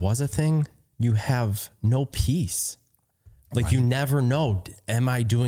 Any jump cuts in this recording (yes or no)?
no